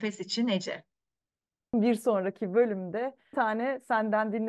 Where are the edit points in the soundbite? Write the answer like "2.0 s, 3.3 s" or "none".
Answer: 1.7 s, 3.3 s